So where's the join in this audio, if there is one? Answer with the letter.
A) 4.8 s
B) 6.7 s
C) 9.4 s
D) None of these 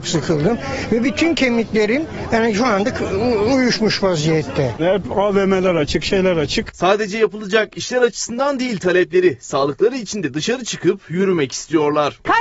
A